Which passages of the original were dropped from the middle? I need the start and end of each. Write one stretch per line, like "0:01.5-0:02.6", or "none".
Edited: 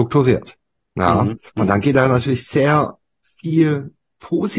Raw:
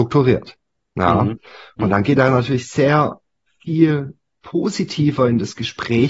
0:01.5-0:01.7